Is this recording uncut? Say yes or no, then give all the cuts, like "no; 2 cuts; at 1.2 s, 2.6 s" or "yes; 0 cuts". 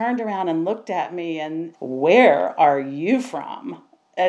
no; 1 cut; at 1.7 s